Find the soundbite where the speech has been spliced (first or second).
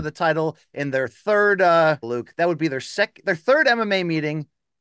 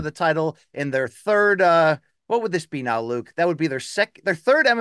first